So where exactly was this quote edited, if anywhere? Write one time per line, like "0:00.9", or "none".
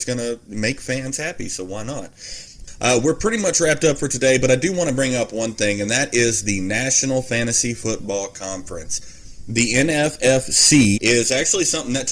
0:10.9